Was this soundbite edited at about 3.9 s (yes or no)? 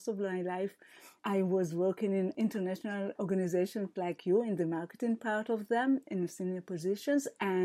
no